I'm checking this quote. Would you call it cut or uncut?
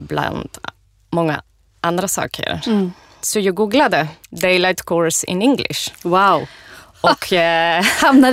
cut